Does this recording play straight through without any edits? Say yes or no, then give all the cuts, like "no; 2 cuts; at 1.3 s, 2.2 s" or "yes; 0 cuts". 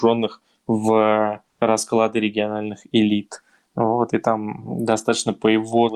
yes; 0 cuts